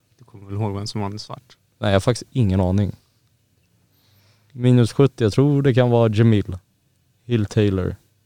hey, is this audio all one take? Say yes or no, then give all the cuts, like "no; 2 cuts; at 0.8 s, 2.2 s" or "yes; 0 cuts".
yes; 0 cuts